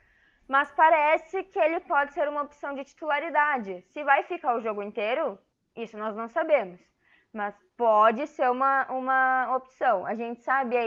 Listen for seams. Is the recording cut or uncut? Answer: uncut